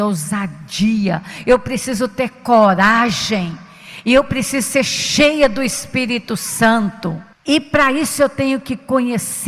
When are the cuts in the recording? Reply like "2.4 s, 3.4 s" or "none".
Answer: 7.3 s